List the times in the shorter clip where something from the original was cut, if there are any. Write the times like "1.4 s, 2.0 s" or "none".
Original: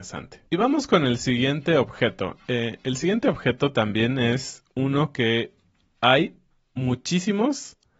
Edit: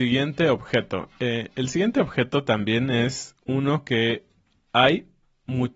none